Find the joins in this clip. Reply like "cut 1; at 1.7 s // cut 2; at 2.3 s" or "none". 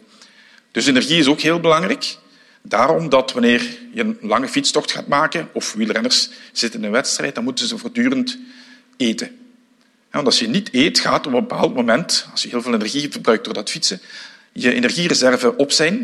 none